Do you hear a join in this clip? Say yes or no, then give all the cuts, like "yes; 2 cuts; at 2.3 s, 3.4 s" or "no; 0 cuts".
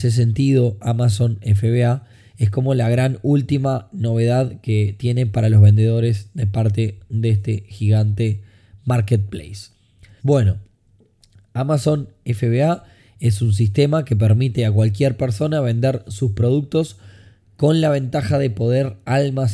yes; 1 cut; at 10.2 s